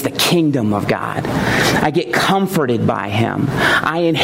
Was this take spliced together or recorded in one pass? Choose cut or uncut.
uncut